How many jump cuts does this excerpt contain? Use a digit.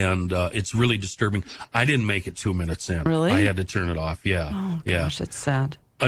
0